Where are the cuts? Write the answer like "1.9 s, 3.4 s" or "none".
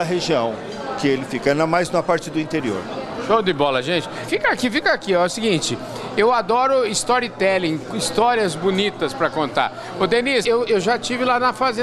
4.3 s, 10.4 s